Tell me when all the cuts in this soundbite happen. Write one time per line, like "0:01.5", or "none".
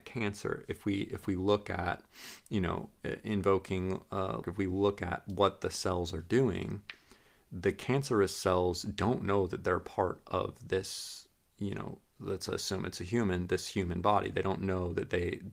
0:04.4